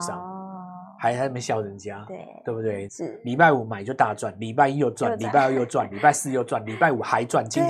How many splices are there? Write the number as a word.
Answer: two